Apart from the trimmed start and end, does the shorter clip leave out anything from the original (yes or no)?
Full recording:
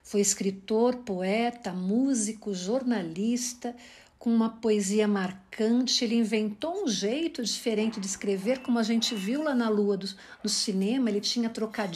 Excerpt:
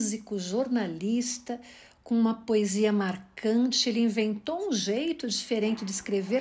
no